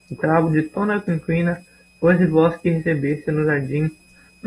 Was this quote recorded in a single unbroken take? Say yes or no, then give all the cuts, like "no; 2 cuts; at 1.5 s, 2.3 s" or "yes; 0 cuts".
yes; 0 cuts